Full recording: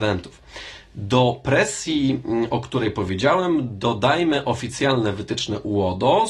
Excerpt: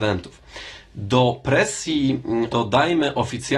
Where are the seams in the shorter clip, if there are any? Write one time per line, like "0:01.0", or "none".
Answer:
0:02.5

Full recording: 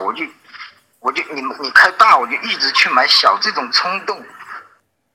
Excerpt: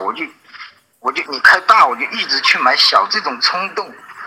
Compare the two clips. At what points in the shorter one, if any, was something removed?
0:01.3

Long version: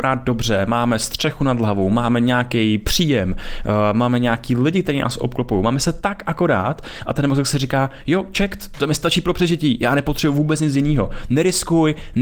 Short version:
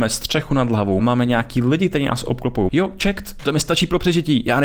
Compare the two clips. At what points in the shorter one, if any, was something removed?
0:01.0
0:02.7

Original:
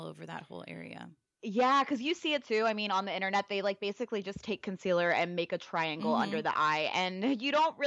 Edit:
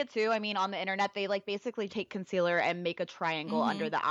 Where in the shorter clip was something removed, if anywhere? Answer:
0:01.9

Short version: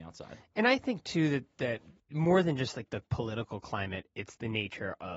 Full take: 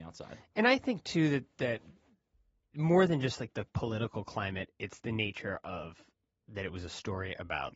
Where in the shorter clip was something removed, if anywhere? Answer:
0:02.0

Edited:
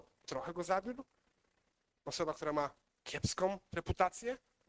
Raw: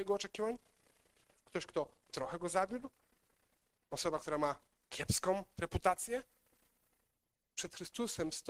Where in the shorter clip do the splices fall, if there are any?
none

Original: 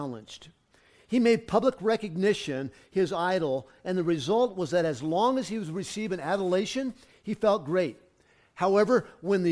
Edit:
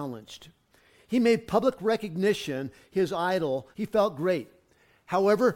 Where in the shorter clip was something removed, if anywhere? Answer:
0:03.7

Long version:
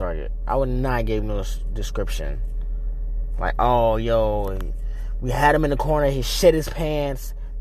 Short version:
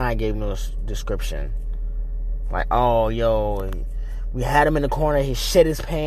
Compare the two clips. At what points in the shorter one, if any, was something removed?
none

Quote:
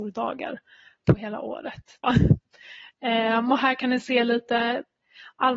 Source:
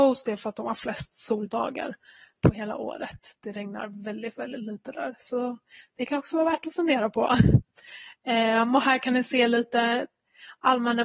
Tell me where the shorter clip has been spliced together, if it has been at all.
0:02.0

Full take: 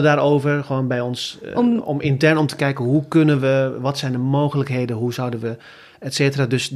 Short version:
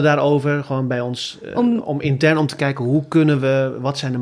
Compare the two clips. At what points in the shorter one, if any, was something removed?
none

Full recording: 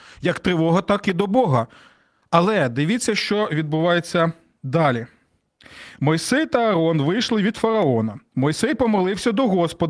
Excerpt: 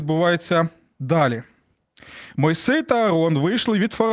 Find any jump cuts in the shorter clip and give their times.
none

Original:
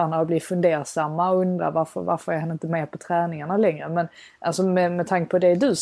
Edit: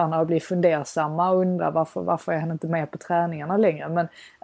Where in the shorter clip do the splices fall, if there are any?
none

